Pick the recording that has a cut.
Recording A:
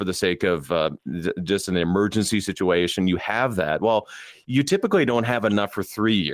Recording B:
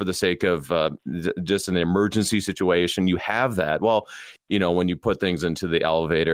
B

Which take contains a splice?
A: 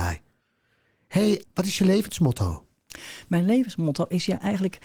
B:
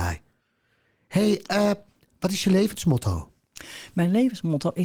A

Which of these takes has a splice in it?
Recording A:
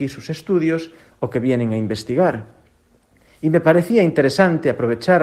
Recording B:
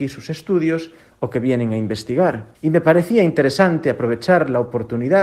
B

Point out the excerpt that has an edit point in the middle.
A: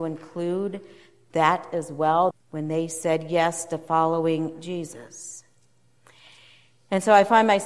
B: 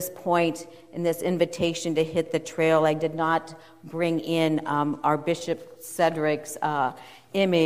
A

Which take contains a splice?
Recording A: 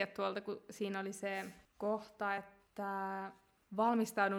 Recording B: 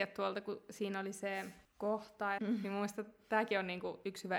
B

